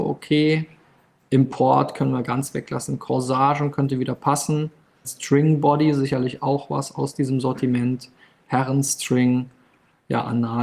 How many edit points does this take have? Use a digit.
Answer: 1